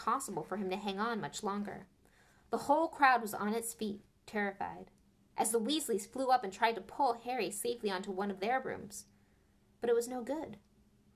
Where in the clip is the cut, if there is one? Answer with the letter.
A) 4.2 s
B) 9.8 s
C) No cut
A